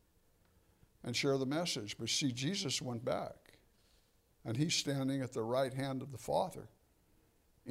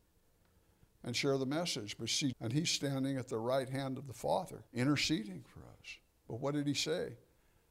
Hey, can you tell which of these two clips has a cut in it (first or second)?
second